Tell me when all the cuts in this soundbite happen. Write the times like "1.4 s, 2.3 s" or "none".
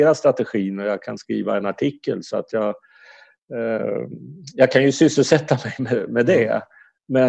6.1 s